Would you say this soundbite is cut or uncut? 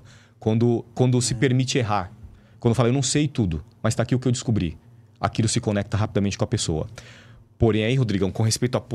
uncut